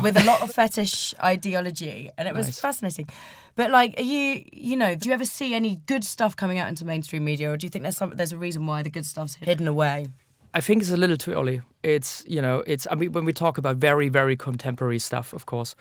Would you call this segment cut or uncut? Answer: uncut